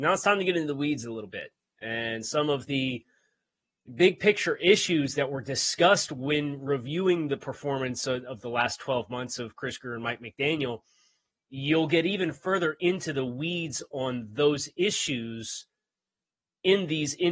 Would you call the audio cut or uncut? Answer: uncut